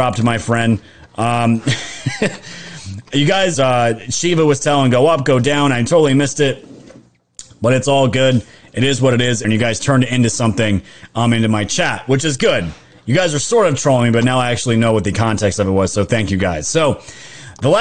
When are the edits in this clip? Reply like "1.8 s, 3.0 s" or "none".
3.5 s, 9.4 s